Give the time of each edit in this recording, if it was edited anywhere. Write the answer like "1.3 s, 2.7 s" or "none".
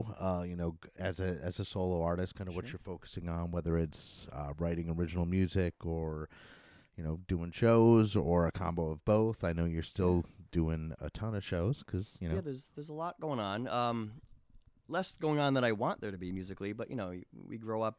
none

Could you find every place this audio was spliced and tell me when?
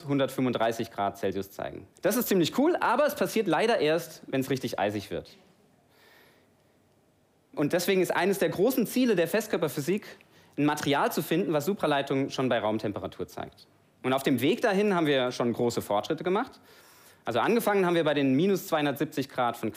1.9 s

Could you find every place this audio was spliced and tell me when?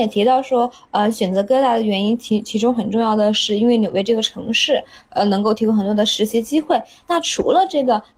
none

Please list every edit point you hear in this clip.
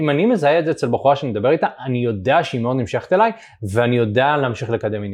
none

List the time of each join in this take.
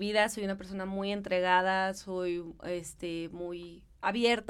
none

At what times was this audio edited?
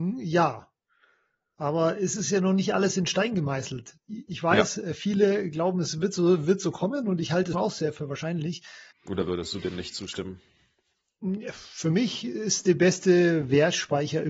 7.5 s, 8.9 s

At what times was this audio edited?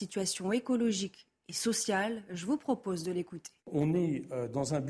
3.6 s

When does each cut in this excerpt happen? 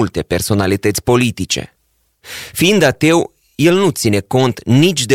none

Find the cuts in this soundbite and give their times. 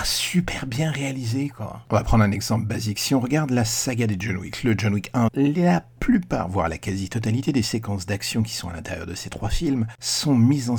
5.3 s

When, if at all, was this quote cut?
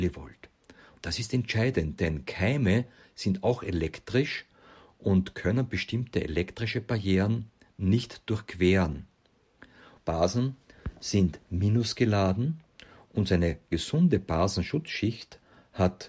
10.0 s

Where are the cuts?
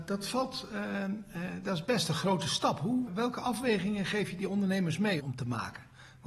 3.1 s, 5.2 s

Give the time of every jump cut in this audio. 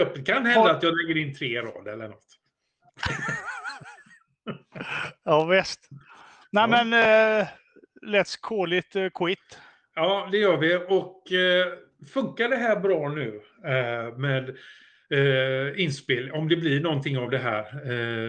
none

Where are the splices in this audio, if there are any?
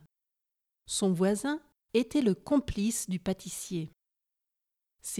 1.7 s

